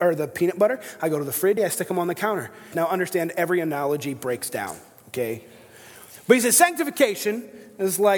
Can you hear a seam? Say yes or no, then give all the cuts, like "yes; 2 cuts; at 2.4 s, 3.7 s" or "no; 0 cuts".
yes; 2 cuts; at 1.6 s, 2.7 s